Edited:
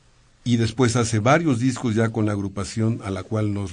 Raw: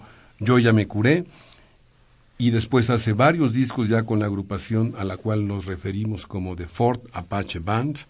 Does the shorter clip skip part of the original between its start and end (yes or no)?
no